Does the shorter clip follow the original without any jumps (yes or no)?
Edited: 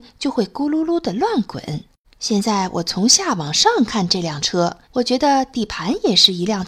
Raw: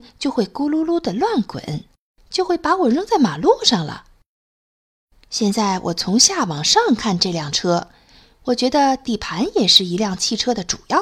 no